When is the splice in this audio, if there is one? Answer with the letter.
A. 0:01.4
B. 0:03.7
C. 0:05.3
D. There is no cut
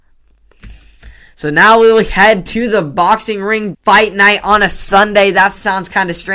B